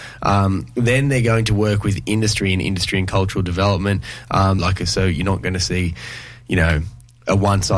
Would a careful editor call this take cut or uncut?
cut